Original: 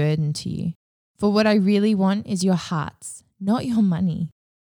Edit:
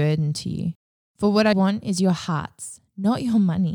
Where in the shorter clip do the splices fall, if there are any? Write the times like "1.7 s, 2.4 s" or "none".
1.5 s